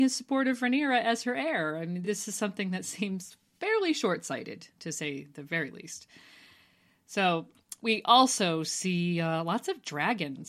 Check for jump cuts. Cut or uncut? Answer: uncut